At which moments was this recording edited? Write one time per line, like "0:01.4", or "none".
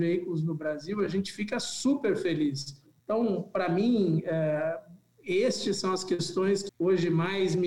0:03.0
0:06.7